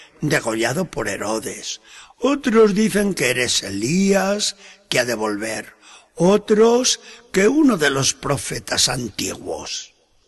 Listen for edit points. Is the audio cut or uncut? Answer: uncut